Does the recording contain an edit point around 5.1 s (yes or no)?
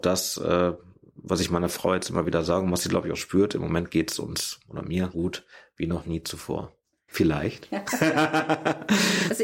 yes